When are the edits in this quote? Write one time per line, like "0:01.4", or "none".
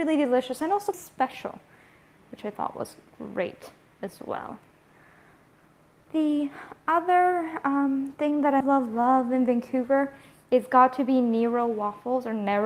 0:00.9
0:08.6